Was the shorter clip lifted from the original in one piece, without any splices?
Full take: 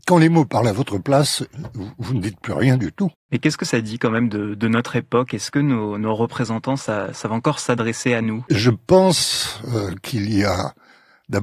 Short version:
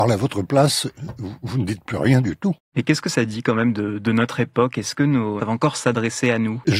no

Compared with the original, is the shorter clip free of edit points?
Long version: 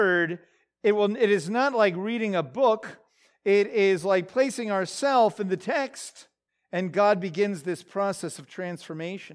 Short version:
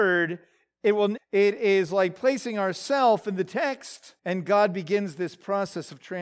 no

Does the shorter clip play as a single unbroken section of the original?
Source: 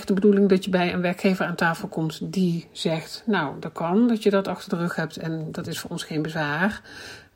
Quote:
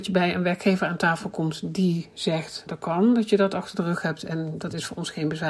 no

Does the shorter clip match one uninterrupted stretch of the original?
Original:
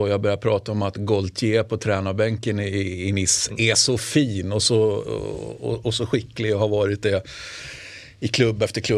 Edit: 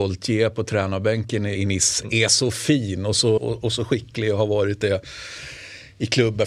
no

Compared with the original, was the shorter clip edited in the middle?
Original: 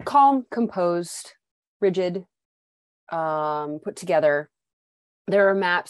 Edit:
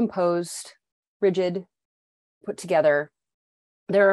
yes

